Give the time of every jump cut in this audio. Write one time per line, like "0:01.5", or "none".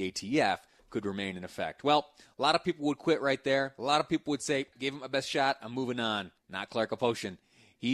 0:04.7
0:06.4